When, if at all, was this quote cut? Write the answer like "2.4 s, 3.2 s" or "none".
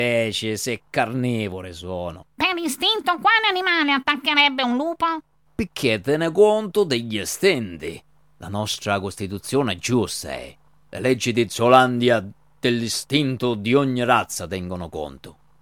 2.2 s, 5.5 s